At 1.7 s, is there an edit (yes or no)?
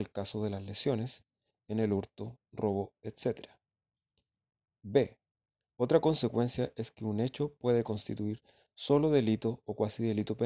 yes